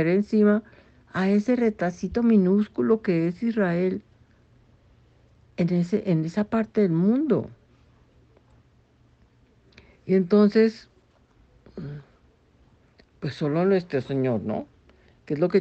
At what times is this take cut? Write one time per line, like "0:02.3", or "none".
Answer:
none